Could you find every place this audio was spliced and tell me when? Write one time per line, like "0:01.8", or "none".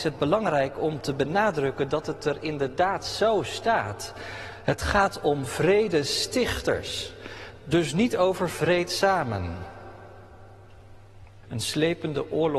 0:11.4